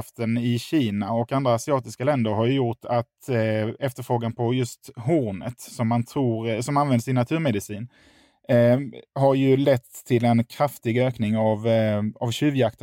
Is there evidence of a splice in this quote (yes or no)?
no